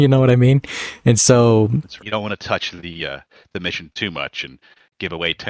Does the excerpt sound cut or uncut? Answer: cut